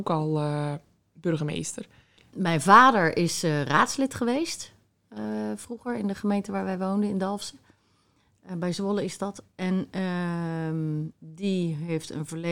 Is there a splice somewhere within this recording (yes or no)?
yes